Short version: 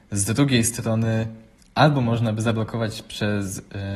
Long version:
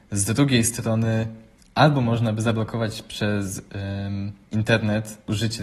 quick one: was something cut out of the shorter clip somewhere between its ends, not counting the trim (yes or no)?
no